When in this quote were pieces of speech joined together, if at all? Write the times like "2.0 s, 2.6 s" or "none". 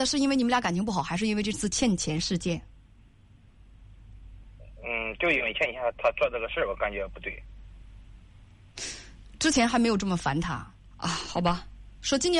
10.8 s